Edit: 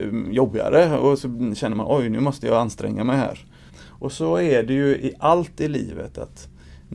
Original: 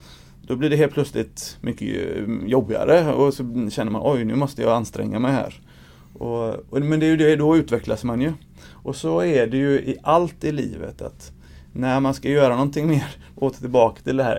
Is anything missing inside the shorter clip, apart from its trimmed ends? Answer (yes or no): yes